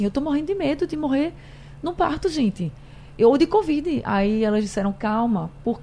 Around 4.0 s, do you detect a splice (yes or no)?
no